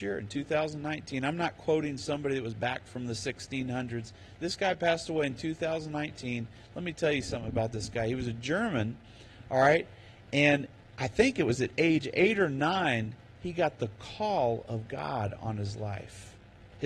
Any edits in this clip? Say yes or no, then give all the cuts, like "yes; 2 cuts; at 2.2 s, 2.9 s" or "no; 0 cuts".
no; 0 cuts